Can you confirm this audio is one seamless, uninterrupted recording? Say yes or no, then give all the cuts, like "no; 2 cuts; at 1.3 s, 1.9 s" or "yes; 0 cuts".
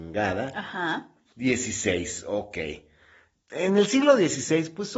no; 1 cut; at 1.3 s